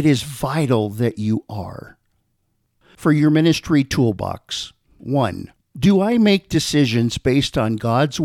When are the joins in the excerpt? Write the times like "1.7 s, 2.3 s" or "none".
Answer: 5.6 s